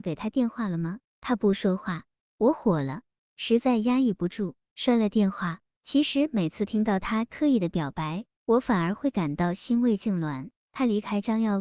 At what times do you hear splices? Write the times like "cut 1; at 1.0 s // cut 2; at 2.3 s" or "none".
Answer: cut 1; at 5.7 s // cut 2; at 10.6 s